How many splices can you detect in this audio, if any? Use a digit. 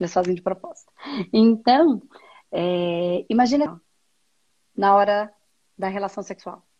1